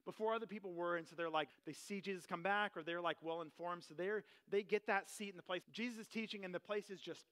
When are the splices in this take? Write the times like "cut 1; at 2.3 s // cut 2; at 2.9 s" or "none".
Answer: cut 1; at 1.5 s // cut 2; at 5.6 s